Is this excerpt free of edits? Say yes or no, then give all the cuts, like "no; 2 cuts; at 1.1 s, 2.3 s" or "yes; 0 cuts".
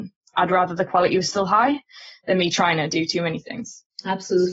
yes; 0 cuts